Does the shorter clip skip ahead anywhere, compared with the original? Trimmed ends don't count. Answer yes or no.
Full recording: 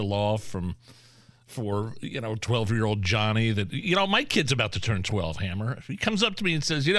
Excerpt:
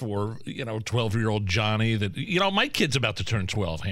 no